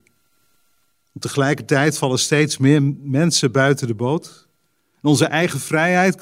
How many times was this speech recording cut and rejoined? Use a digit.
0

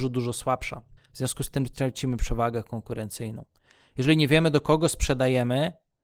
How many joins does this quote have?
1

